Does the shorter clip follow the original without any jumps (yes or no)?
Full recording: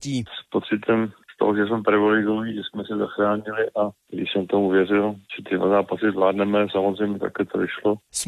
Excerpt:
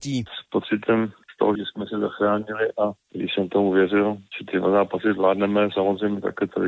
no